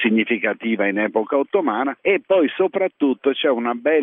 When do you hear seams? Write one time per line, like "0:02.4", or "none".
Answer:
none